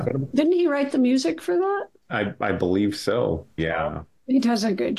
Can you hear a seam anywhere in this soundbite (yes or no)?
yes